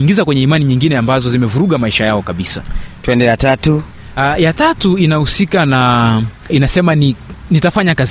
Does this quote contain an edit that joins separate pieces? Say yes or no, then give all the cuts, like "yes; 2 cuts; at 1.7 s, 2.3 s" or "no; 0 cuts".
yes; 1 cut; at 6.5 s